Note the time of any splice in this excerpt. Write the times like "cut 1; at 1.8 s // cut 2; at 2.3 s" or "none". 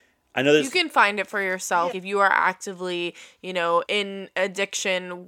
cut 1; at 1.9 s // cut 2; at 3.8 s